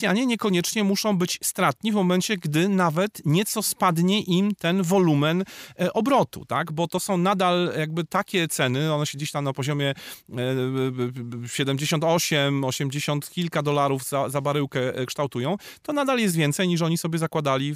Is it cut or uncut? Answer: uncut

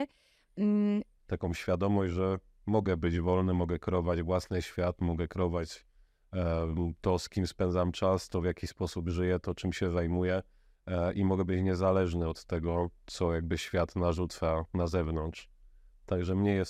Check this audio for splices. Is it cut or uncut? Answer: cut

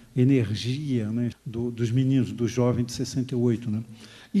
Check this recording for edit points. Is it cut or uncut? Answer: cut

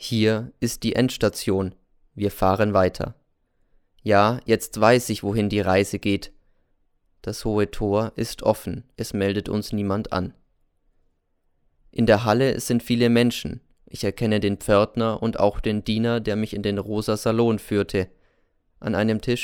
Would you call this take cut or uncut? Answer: cut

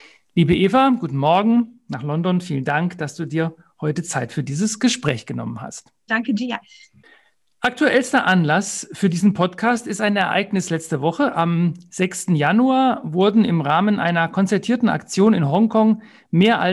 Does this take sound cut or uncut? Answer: cut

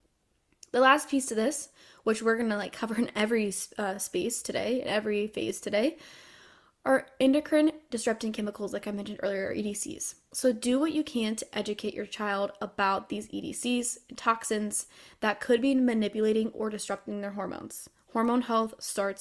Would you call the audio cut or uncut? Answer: uncut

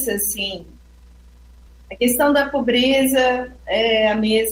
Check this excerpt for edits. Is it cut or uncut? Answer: uncut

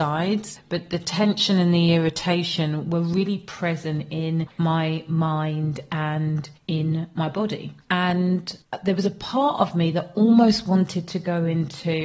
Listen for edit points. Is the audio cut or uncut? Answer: uncut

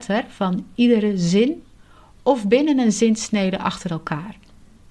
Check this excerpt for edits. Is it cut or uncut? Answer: uncut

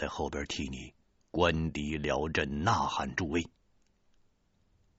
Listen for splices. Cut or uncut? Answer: uncut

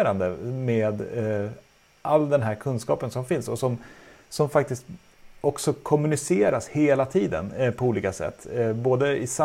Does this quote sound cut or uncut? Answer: uncut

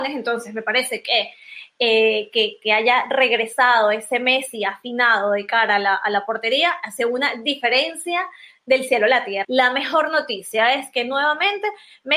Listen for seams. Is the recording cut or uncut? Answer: cut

